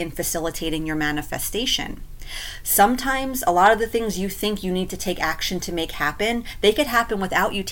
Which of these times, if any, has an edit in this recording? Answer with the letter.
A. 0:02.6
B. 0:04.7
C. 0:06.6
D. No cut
D